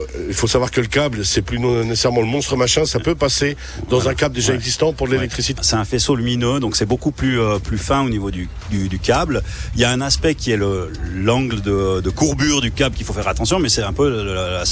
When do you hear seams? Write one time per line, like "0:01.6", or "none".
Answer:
0:05.6